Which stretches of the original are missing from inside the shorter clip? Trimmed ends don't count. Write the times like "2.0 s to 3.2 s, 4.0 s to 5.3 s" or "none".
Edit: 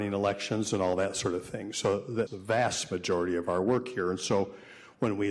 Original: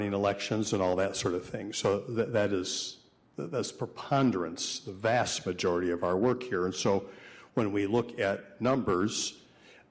2.3 s to 4.8 s